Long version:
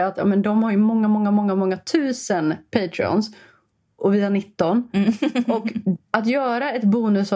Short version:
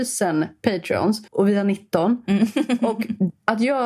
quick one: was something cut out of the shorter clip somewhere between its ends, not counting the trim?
yes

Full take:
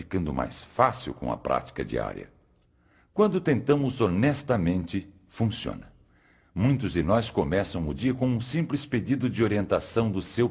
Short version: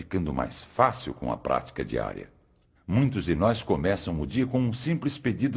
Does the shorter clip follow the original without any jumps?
no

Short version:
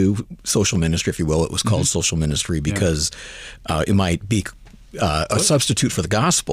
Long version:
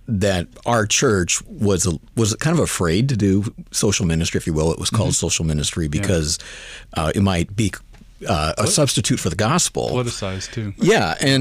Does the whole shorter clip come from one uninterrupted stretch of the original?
yes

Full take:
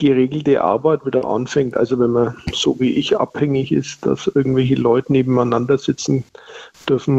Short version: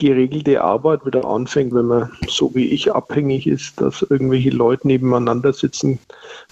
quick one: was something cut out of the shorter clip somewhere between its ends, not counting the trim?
yes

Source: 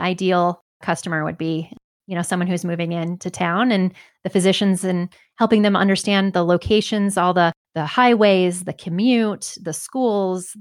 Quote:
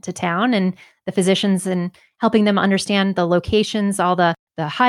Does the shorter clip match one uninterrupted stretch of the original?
yes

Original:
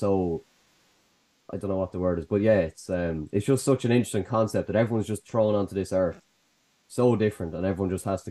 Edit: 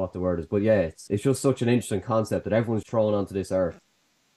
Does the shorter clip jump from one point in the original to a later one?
yes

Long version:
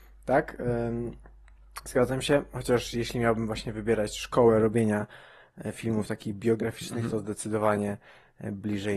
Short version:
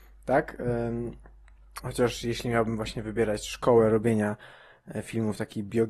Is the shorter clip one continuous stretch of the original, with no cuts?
no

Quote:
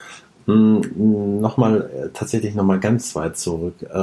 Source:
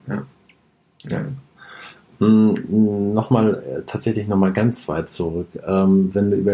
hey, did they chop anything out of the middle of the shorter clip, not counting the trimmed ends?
no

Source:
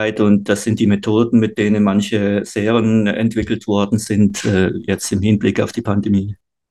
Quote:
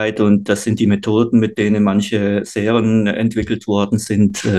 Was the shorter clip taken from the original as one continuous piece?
yes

